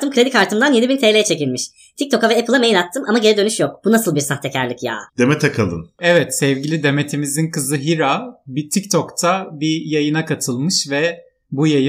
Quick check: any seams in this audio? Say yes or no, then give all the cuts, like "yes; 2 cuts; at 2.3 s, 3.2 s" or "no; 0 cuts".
yes; 1 cut; at 5.1 s